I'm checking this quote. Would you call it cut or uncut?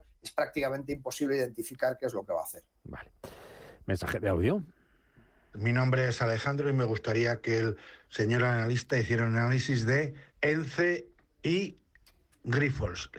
cut